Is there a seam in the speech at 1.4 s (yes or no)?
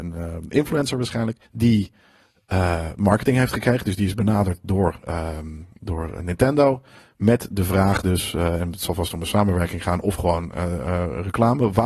yes